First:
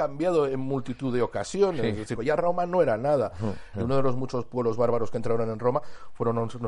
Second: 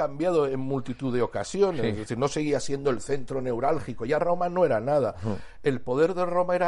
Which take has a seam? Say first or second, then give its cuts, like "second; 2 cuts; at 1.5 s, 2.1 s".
first; 2 cuts; at 2.1 s, 3.7 s